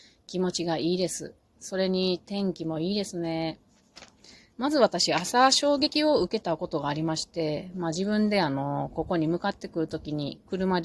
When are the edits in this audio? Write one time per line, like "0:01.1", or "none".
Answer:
0:04.5

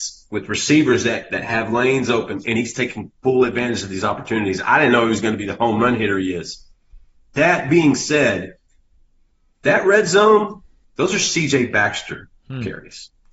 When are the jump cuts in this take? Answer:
0:10.8

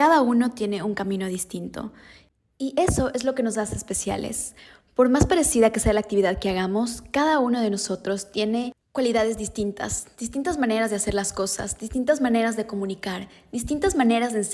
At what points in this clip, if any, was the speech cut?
none

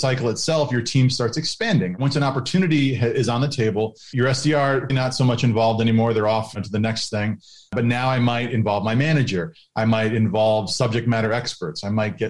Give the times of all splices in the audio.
0:04.9

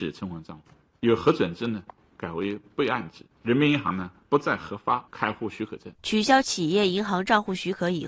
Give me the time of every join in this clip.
0:06.0

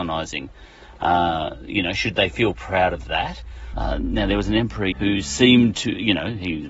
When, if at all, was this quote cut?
0:03.7
0:04.9

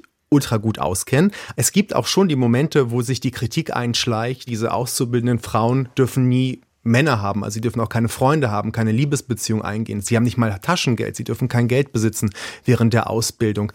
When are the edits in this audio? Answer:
0:01.5
0:04.5

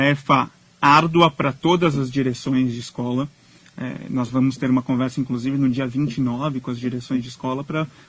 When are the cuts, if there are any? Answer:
none

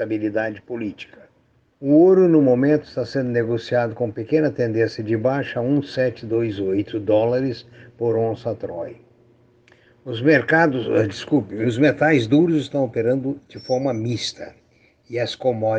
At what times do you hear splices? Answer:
0:01.7

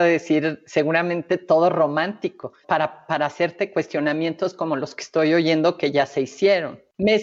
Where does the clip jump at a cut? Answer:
0:02.6

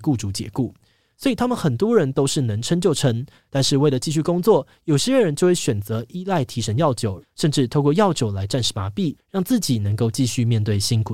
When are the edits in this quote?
0:03.5
0:07.2
0:09.2

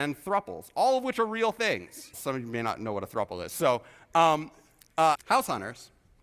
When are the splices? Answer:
0:02.1
0:05.2

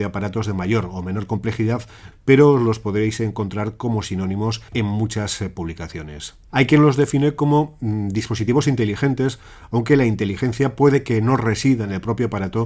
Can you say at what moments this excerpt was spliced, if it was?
0:02.1
0:06.5

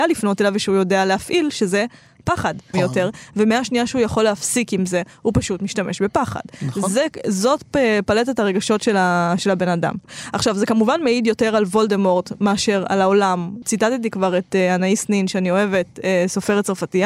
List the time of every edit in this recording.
0:02.7

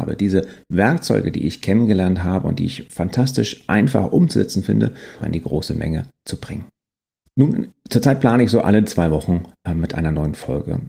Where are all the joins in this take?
0:05.2
0:07.3

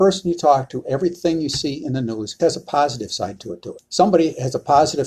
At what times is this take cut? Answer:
0:02.4
0:03.8

